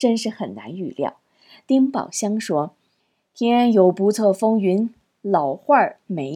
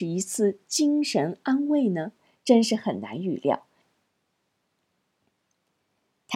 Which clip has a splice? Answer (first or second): second